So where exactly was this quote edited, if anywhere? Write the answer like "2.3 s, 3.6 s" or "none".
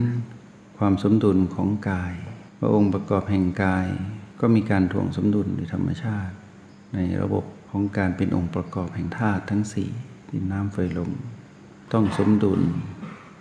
2.5 s